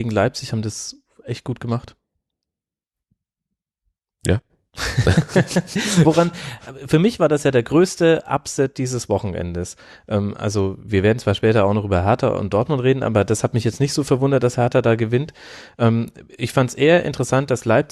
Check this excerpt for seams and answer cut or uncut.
uncut